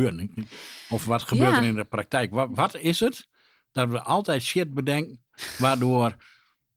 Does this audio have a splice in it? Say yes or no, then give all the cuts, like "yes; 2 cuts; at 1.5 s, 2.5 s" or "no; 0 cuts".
no; 0 cuts